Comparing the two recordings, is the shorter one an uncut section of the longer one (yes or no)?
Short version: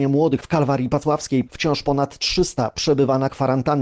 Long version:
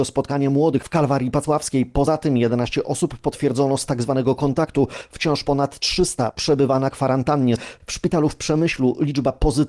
no